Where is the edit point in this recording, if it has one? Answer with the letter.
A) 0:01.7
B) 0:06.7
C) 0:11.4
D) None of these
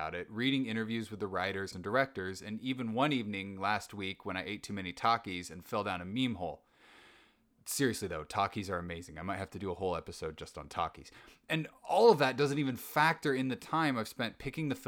A